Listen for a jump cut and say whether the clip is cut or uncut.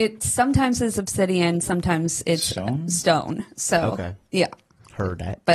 uncut